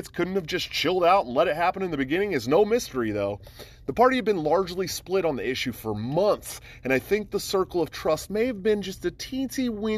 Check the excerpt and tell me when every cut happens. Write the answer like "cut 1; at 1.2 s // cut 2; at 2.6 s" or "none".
none